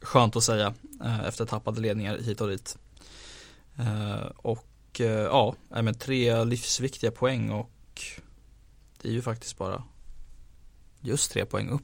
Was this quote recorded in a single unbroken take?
yes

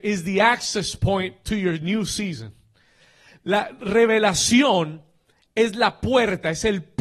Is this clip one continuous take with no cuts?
yes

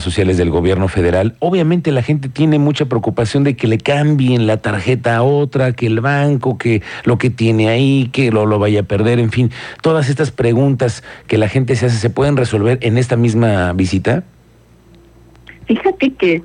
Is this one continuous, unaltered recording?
yes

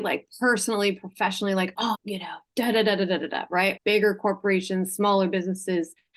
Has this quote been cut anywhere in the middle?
yes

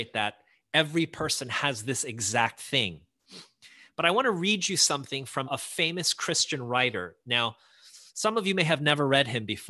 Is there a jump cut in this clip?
yes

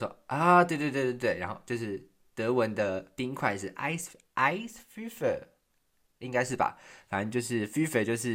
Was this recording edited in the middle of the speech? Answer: no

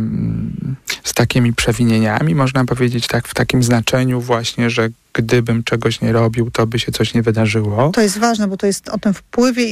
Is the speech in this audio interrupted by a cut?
no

